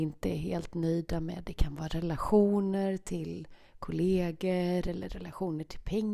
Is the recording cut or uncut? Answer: uncut